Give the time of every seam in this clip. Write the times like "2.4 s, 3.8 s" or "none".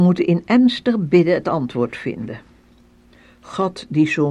none